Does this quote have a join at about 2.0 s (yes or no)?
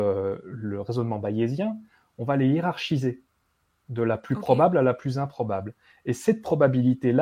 no